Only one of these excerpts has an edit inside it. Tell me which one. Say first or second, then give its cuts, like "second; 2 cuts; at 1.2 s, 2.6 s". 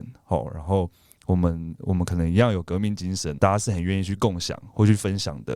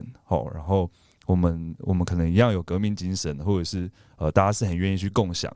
first; 1 cut; at 3.4 s